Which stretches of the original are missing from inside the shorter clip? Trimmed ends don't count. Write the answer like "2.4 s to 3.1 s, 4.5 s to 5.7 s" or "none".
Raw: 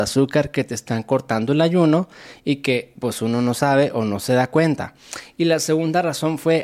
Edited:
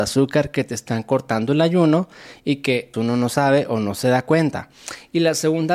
2.9 s to 3.2 s